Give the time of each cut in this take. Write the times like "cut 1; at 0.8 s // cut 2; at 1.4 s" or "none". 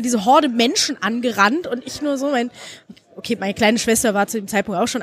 none